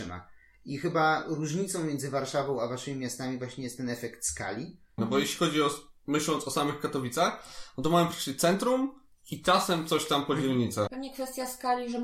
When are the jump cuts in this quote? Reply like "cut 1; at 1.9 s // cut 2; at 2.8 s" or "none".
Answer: cut 1; at 5.0 s // cut 2; at 10.9 s